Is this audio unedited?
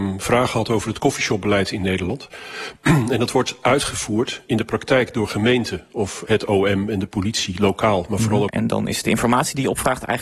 no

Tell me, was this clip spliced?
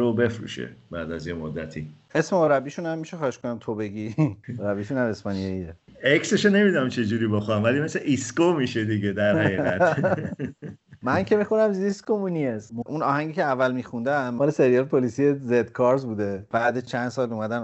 yes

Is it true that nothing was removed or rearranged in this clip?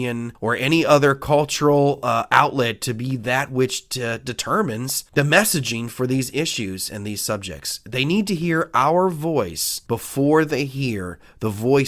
yes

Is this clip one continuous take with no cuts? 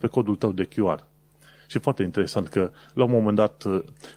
yes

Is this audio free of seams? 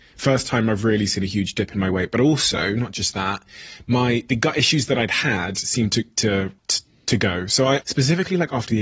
no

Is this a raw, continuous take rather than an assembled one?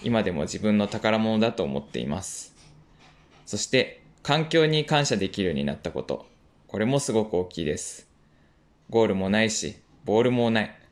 yes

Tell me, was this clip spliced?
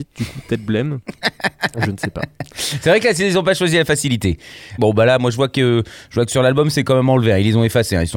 yes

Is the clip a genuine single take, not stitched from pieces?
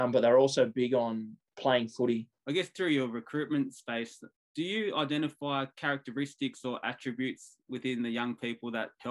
no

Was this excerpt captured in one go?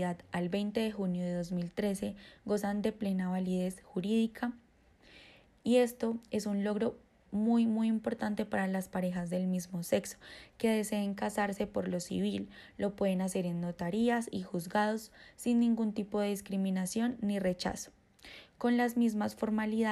yes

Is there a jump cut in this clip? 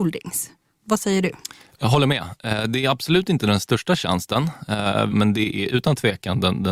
yes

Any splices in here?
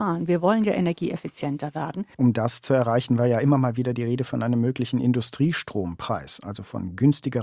yes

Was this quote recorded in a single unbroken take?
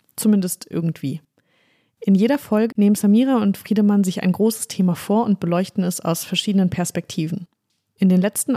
no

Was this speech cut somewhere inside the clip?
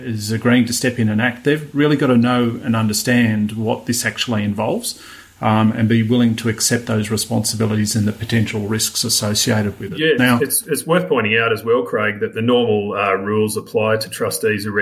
no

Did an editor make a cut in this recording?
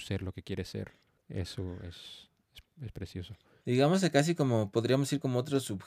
yes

